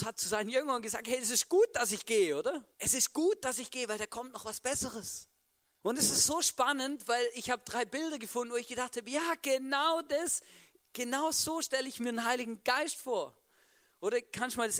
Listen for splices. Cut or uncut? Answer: cut